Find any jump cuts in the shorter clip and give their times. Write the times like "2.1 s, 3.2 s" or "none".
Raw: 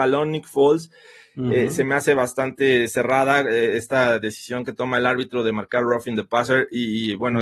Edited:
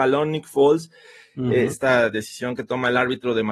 1.7 s

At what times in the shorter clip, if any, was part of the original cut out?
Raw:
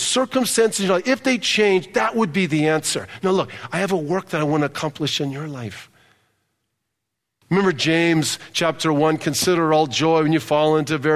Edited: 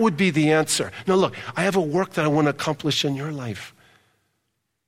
none

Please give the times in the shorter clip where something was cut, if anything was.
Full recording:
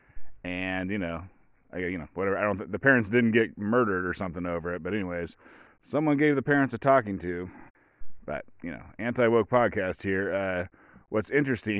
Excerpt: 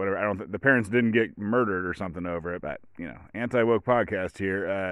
2.6 s

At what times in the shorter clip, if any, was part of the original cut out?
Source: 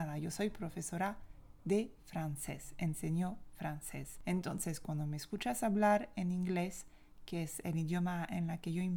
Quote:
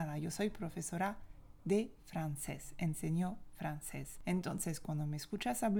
none

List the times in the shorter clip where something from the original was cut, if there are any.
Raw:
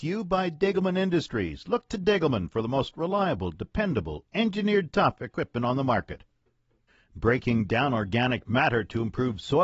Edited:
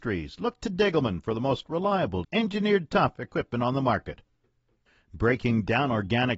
2.2 s

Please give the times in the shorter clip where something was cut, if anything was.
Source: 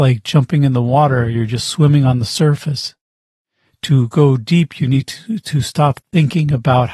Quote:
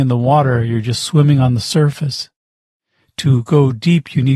none

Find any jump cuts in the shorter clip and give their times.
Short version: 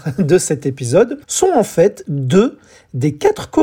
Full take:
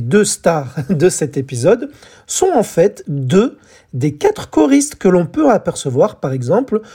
1.2 s

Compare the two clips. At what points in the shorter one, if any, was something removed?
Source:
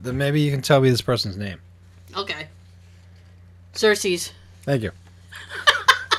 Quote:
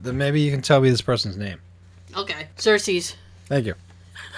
2.5 s

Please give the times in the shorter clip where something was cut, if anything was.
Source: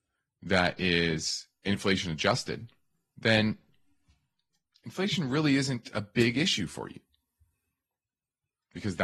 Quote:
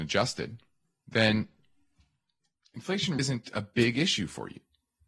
3.2 s

